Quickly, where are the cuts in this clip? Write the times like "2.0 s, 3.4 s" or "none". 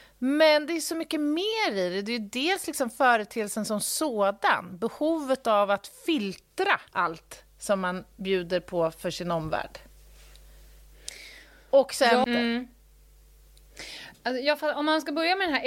6.9 s, 12.2 s